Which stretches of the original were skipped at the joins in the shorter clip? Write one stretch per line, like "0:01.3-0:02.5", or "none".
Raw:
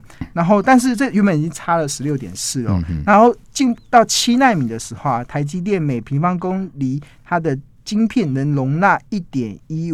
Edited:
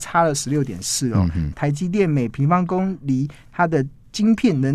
0:03.1-0:05.2